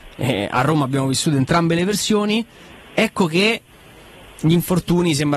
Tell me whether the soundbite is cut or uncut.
uncut